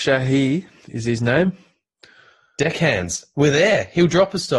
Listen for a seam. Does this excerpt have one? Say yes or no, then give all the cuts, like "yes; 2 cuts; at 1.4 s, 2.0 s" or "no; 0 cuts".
no; 0 cuts